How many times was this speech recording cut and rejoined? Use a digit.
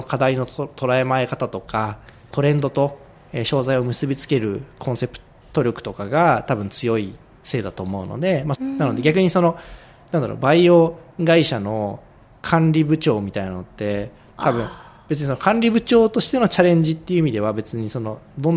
2